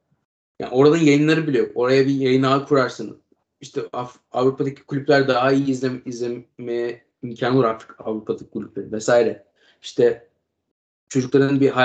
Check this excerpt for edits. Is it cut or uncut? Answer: uncut